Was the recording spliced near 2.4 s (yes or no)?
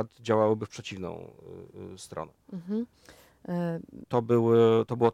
no